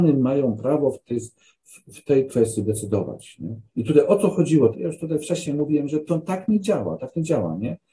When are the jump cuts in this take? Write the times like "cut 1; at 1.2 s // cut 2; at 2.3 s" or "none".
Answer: cut 1; at 3.7 s // cut 2; at 4.7 s